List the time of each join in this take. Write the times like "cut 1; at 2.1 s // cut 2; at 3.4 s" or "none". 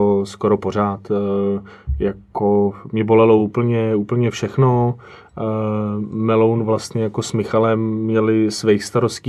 none